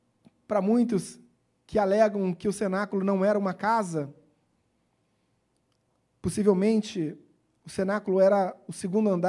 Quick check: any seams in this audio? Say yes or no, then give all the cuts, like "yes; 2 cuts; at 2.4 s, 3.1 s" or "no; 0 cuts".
no; 0 cuts